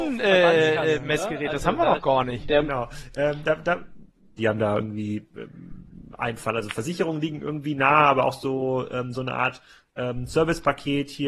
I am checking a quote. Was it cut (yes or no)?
yes